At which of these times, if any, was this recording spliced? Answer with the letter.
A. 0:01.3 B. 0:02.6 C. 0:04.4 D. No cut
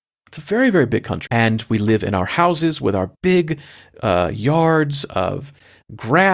A